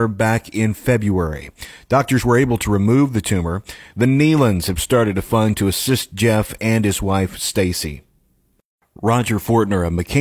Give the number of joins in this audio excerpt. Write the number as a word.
one